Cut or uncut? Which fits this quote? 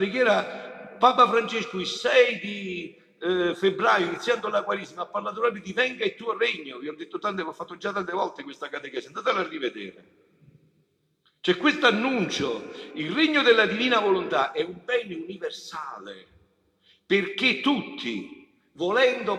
uncut